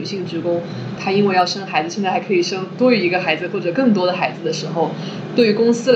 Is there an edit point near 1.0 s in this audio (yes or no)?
yes